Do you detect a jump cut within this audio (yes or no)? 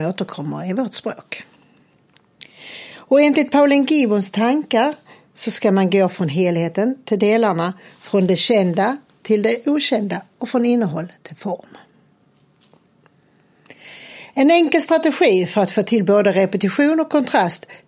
no